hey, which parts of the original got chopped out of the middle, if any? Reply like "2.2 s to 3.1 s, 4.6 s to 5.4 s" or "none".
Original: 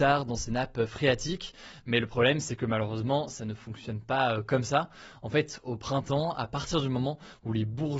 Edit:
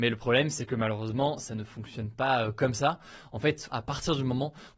5.6 s to 6.3 s